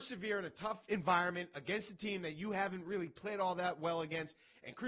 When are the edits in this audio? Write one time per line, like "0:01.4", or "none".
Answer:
none